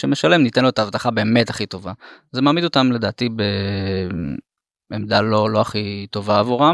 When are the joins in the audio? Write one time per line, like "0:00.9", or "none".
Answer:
none